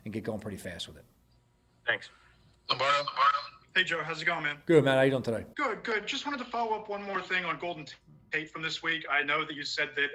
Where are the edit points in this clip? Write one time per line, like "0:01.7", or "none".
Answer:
0:05.5